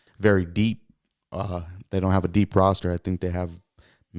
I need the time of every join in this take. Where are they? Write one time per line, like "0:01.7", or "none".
none